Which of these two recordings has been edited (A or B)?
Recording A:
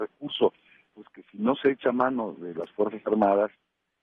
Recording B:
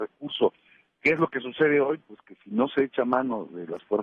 A